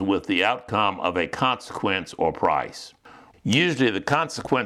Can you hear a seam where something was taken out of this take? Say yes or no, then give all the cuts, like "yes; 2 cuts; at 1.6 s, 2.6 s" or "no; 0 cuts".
yes; 1 cut; at 3.3 s